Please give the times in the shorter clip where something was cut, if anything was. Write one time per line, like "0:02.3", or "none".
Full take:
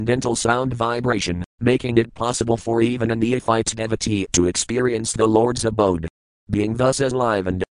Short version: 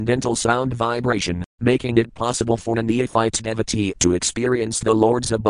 0:02.7